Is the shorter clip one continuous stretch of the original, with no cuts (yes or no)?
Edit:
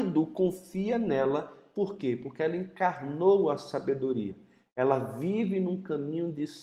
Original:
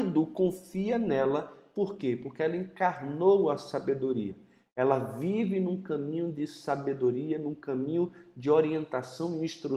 yes